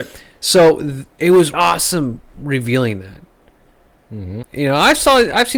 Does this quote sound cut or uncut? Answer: cut